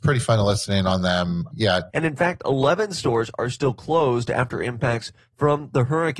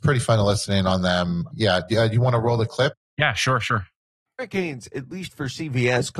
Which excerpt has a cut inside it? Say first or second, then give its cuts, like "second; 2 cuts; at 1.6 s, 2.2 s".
first; 1 cut; at 1.9 s